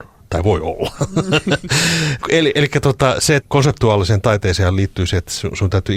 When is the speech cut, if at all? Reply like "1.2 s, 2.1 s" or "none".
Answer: 2.2 s, 3.4 s